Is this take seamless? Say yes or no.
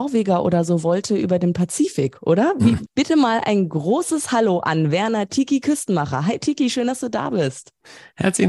no